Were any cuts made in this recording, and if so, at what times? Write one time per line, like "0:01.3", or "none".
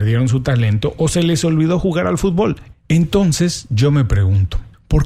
0:02.7